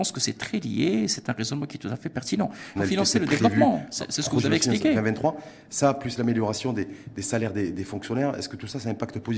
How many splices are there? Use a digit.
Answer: 1